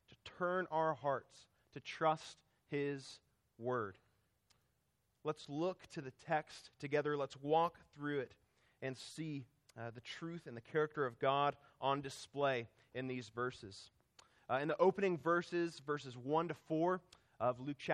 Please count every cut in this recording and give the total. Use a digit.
0